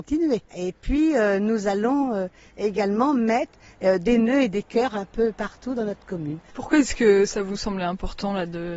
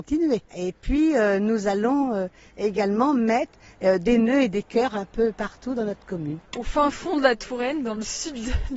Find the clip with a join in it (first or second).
second